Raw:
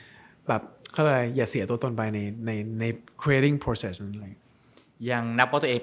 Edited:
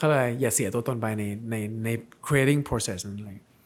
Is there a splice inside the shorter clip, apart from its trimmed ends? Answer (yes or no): no